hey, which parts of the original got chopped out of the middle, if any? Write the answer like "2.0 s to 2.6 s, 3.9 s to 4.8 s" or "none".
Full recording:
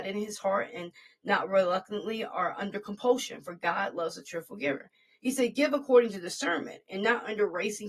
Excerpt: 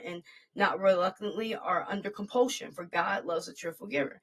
none